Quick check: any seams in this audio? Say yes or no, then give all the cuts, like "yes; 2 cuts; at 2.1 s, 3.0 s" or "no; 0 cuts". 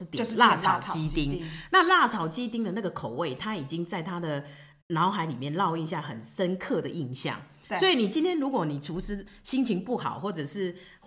no; 0 cuts